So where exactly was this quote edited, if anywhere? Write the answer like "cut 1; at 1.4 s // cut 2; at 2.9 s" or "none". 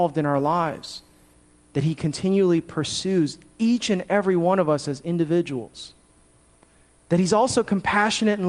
none

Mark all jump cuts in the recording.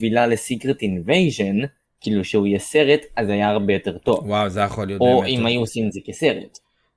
none

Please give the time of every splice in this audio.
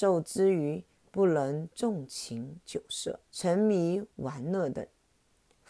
cut 1; at 3.2 s

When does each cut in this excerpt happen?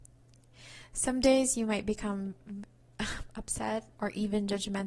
cut 1; at 4.0 s

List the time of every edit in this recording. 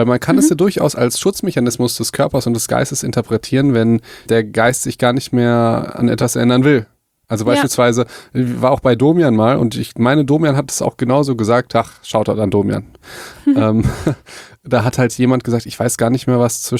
cut 1; at 4.3 s

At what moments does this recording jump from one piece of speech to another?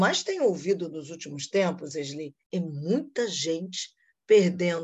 cut 1; at 2.4 s

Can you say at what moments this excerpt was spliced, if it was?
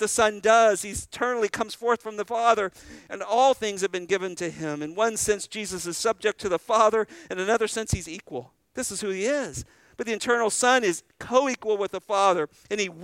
none

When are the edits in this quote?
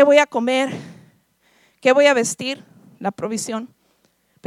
none

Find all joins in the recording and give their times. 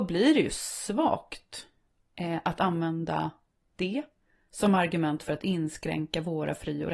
none

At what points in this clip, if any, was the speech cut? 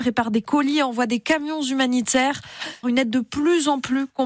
cut 1; at 2.8 s

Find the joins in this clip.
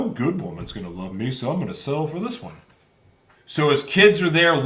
cut 1; at 3.3 s

